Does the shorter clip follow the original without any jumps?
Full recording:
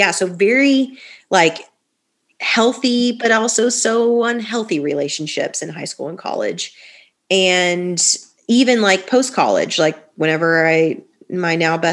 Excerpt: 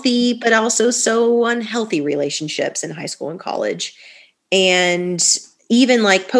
yes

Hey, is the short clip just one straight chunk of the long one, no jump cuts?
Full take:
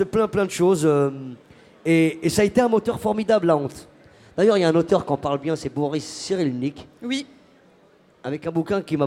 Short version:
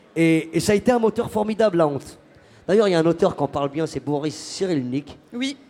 yes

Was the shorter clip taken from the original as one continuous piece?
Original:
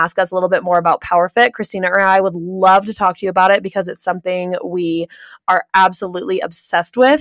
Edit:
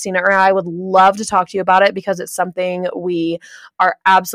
yes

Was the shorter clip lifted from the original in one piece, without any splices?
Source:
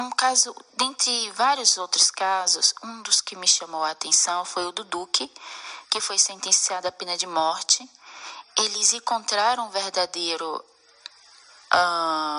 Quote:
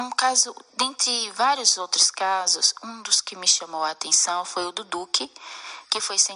yes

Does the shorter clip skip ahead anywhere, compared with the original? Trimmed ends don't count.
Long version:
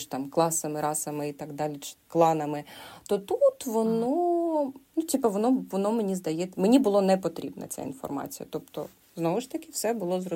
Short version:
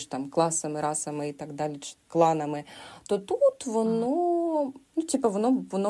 no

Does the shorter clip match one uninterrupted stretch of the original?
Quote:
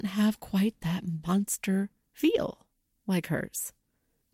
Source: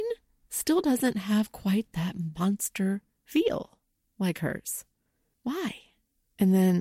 yes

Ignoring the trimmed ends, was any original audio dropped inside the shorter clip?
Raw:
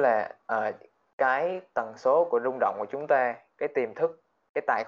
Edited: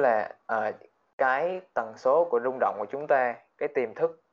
no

